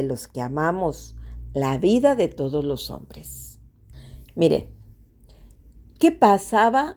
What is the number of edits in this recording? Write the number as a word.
one